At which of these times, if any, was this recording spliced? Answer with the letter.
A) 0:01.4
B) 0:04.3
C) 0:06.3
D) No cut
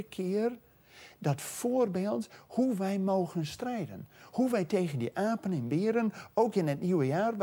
D